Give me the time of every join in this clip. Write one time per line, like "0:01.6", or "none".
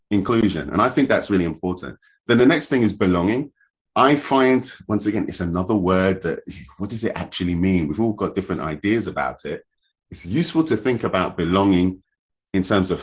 none